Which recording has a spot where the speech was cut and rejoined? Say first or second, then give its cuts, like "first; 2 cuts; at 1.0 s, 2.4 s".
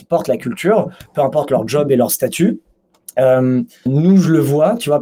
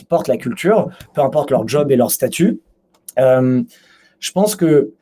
first; 1 cut; at 3.9 s